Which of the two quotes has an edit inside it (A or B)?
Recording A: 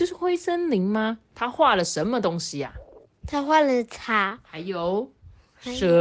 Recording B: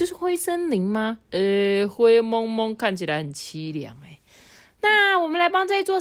A